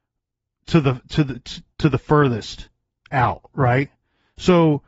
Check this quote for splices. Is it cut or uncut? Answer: cut